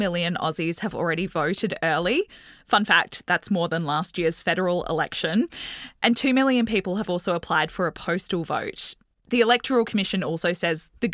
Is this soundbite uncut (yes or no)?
yes